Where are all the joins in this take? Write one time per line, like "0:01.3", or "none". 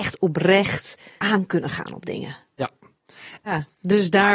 0:01.2
0:03.4